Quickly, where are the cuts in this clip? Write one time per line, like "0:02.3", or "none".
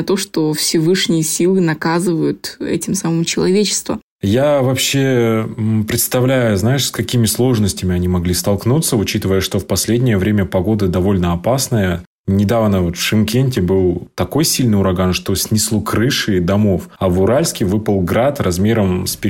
0:04.1